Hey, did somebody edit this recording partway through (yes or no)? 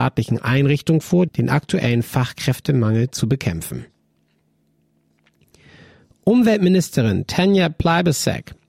yes